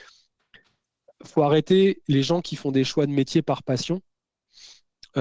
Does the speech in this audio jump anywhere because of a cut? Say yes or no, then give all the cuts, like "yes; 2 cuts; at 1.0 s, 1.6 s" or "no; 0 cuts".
no; 0 cuts